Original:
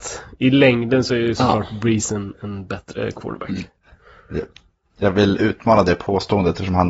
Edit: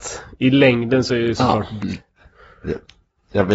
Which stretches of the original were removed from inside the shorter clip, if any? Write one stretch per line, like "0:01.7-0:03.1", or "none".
0:01.8-0:03.5